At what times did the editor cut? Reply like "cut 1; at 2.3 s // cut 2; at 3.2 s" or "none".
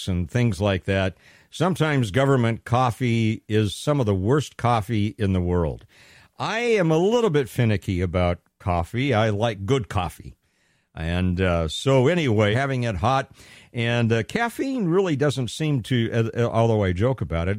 cut 1; at 12.5 s